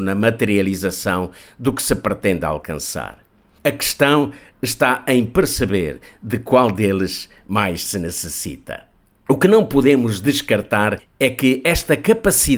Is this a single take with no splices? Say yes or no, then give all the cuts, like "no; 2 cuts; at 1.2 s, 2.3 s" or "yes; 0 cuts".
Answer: yes; 0 cuts